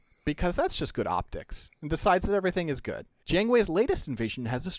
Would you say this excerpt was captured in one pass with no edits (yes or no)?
no